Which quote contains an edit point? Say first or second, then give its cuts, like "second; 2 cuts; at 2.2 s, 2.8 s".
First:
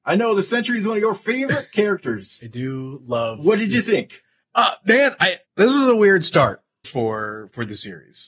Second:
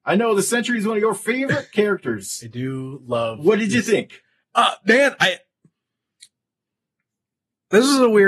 first; 2 cuts; at 5.4 s, 6.8 s